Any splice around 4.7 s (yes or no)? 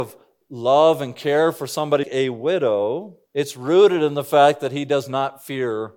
no